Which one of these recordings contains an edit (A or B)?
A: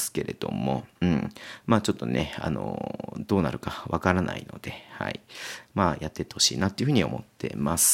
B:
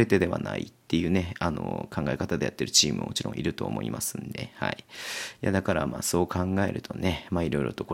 A